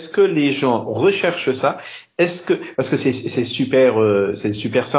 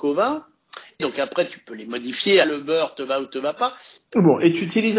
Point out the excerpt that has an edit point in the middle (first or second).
second